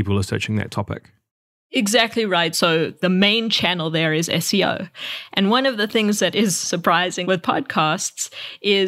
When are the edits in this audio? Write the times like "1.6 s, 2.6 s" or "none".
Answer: 2.5 s, 7.2 s